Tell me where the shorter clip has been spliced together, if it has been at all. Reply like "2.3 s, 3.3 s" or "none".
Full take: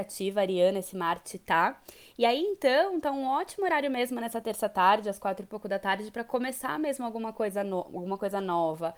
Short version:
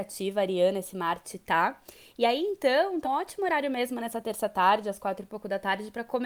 3.0 s